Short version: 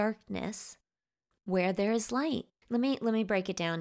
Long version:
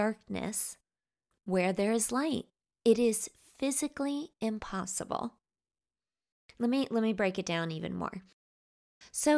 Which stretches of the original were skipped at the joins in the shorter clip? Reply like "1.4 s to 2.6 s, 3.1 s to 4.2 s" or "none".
2.6 s to 6.5 s